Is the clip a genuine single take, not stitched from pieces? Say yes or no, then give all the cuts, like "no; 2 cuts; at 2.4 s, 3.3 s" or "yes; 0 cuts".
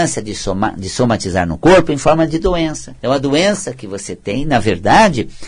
no; 1 cut; at 3.0 s